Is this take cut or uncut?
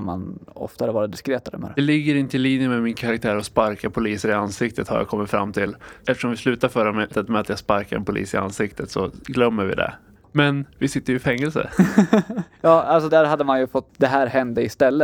cut